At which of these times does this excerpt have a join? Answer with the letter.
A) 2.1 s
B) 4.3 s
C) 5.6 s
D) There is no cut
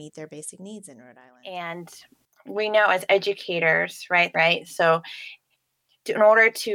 B